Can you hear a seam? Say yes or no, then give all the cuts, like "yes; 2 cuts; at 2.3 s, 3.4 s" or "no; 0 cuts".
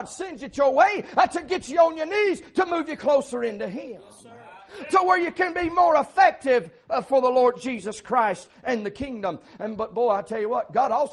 no; 0 cuts